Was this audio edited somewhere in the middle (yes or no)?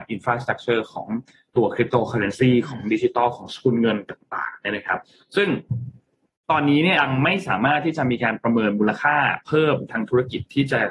yes